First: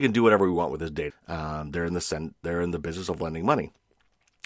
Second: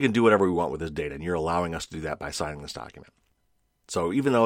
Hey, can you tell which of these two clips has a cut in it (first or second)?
first